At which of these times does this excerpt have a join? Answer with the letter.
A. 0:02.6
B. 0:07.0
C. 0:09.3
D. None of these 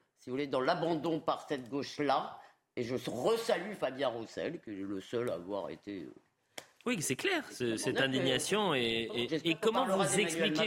C